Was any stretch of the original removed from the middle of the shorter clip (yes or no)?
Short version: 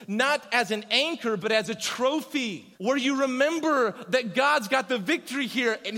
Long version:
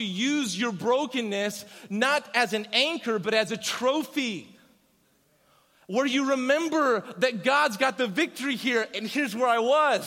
yes